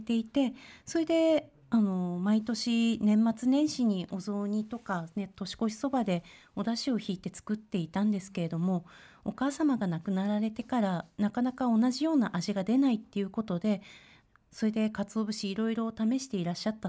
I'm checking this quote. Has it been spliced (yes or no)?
no